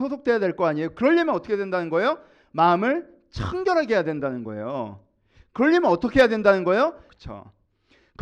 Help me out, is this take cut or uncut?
cut